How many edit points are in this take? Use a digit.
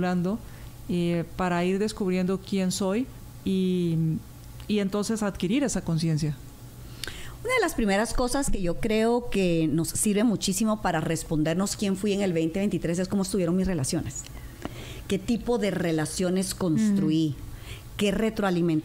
1